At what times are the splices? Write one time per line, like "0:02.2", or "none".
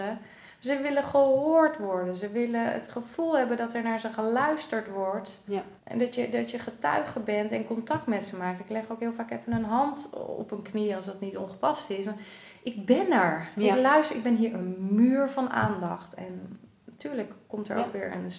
0:05.8
0:16.2